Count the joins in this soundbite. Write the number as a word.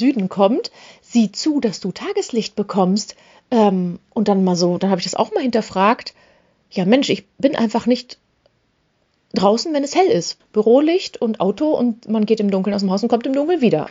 one